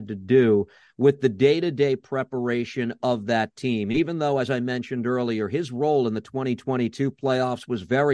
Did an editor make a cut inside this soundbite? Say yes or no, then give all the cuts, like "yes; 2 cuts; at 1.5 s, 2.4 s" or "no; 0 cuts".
no; 0 cuts